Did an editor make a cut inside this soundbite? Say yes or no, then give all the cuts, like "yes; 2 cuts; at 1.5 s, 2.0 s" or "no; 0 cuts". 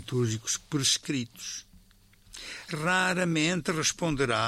no; 0 cuts